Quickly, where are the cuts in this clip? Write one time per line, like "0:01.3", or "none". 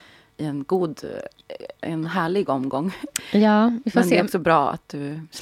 0:01.8